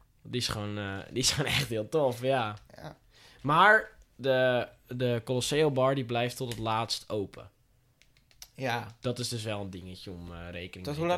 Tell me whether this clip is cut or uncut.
cut